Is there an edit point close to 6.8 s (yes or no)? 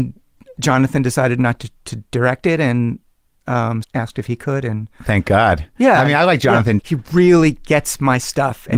yes